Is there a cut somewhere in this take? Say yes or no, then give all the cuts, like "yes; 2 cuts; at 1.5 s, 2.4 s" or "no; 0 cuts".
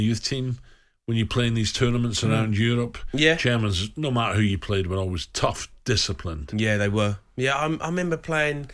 no; 0 cuts